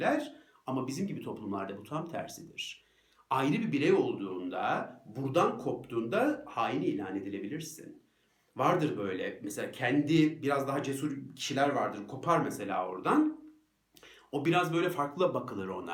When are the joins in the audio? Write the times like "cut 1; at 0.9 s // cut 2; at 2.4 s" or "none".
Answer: none